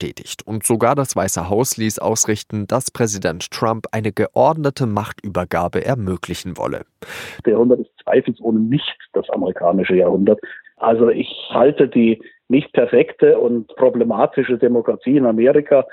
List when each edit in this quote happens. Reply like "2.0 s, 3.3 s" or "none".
7.4 s, 10.6 s